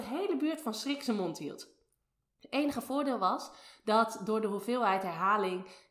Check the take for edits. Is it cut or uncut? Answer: uncut